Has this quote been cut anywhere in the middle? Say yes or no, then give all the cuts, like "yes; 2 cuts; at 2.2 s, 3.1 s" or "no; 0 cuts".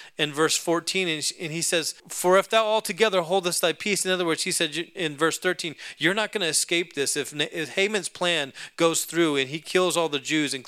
yes; 1 cut; at 2.0 s